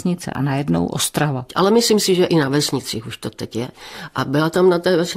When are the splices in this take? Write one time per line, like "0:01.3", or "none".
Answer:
0:01.5